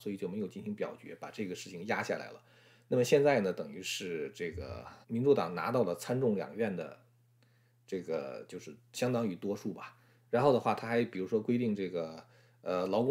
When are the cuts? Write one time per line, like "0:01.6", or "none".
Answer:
0:05.0
0:10.3